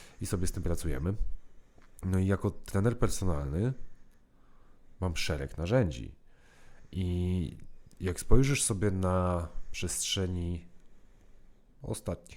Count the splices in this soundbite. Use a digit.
0